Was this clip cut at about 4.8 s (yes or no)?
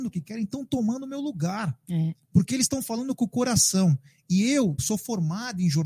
yes